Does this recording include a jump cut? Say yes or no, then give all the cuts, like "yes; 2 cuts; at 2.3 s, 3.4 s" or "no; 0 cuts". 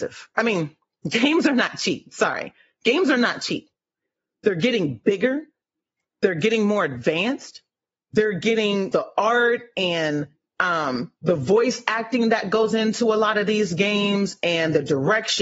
yes; 1 cut; at 8.9 s